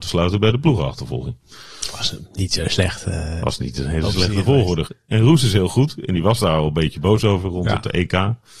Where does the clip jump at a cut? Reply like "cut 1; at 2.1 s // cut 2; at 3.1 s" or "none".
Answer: cut 1; at 4.9 s